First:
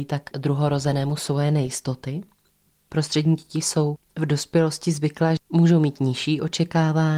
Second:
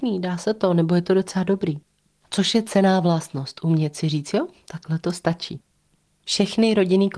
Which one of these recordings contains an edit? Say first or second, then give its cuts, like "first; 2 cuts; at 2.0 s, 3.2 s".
first; 3 cuts; at 2.7 s, 4.0 s, 5.4 s